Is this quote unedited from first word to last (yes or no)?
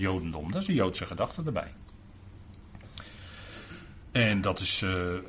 yes